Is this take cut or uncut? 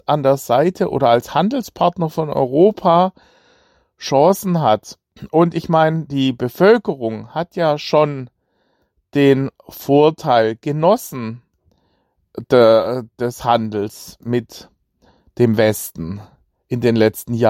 uncut